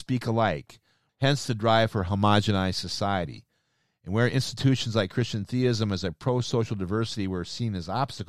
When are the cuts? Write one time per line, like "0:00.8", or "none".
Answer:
0:01.1